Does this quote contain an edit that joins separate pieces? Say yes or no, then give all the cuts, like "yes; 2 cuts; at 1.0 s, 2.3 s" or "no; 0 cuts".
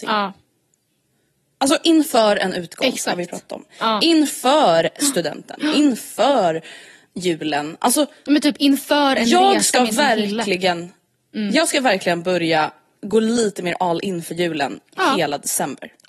no; 0 cuts